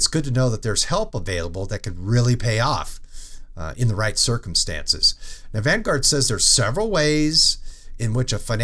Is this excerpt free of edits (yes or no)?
yes